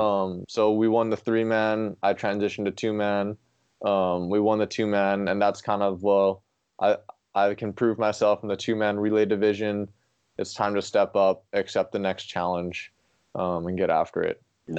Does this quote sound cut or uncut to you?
uncut